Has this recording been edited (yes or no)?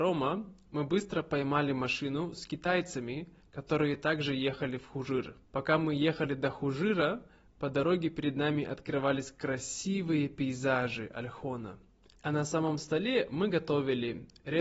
yes